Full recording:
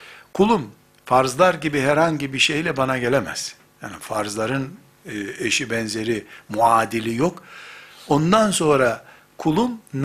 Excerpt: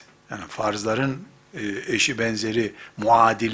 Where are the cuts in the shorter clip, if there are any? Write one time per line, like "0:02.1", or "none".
none